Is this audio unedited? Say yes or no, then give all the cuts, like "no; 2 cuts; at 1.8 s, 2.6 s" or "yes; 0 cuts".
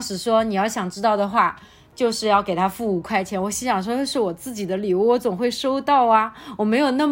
yes; 0 cuts